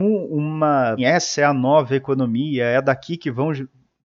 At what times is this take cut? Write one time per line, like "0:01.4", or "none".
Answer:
0:01.0

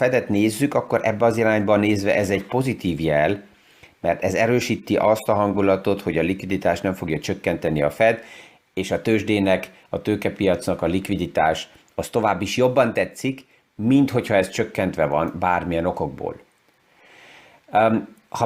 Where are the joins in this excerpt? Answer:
none

